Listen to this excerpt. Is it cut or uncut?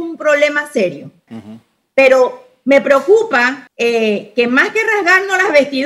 cut